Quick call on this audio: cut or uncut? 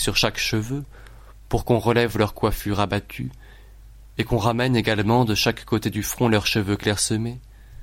uncut